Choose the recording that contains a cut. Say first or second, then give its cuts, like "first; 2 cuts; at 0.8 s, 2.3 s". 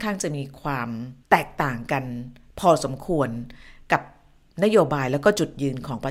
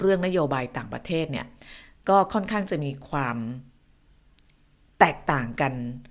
first; 1 cut; at 1.2 s